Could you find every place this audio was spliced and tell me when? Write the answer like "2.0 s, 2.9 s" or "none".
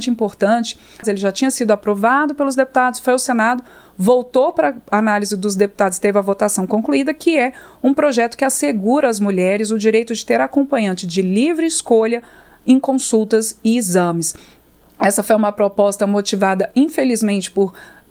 1.0 s

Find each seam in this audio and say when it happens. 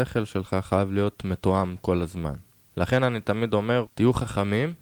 2.7 s, 3.9 s

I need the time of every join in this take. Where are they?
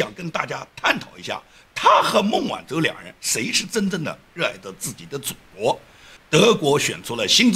6.2 s

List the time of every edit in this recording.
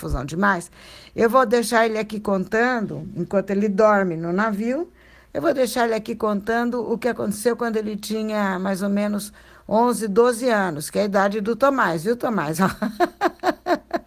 none

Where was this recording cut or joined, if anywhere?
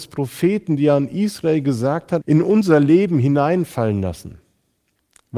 2.2 s

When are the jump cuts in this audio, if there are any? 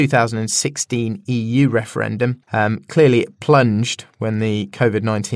2.4 s

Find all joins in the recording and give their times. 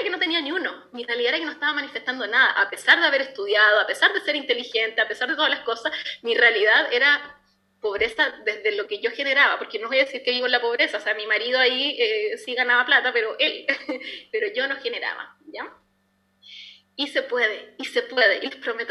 none

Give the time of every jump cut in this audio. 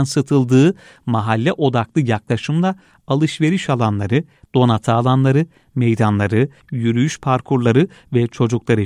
6.6 s

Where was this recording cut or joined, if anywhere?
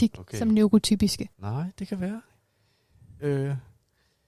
1.3 s

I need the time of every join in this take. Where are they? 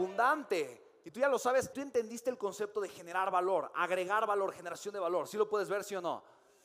1.7 s

